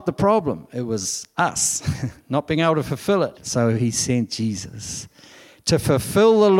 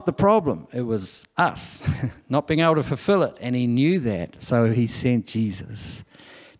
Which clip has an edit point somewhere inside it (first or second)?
first